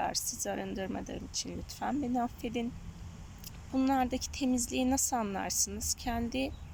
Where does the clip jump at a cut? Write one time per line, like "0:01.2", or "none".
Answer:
0:03.7